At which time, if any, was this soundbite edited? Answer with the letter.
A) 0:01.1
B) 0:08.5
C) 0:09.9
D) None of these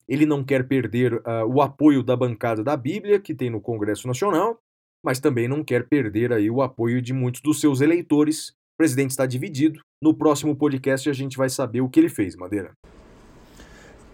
C